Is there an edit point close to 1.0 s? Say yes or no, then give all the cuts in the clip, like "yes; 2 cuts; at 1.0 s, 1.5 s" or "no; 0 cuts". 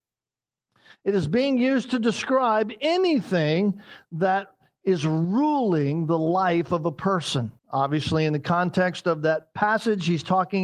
no; 1 cut; at 7.6 s